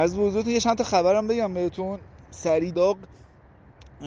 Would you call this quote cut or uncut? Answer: cut